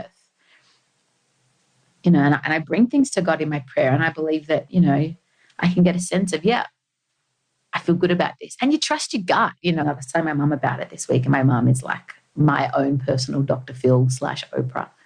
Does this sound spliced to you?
yes; 1 cut; at 9.8 s

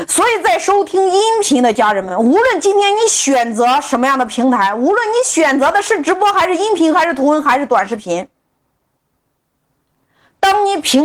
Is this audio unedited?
yes; 0 cuts

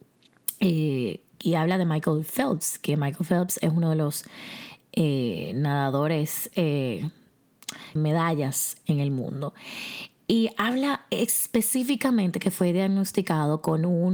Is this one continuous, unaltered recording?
no; 1 cut; at 8.0 s

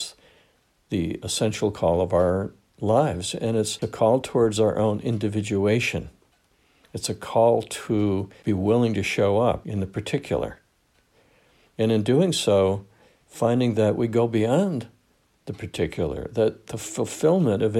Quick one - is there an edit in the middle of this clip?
no; 0 cuts

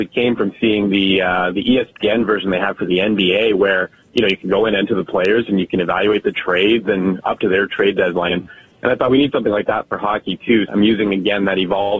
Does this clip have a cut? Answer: yes; 2 cuts; at 8.3 s, 10.7 s

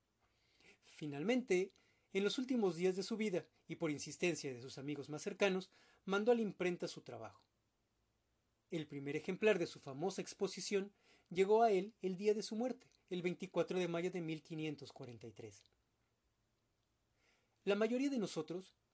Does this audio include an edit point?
no; 0 cuts

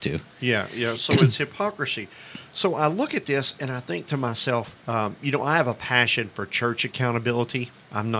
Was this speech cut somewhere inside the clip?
yes; 2 cuts; at 1.0 s, 4.8 s

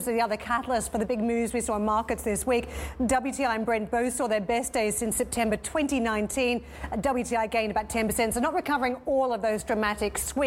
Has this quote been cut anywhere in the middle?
no; 0 cuts

